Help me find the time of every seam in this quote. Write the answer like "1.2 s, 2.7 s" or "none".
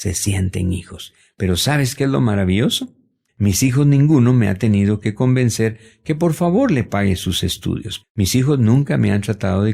3.3 s, 8.0 s